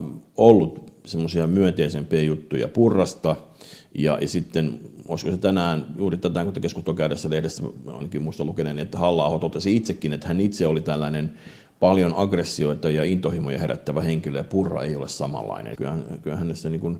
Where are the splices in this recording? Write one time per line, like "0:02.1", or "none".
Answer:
0:15.8